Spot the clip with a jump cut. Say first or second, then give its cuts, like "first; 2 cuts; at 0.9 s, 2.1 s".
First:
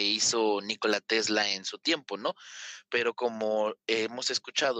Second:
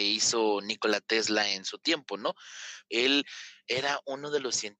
second; 1 cut; at 2.9 s